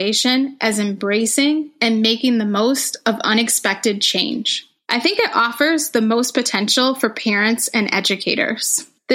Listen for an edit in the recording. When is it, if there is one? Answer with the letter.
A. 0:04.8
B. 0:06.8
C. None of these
A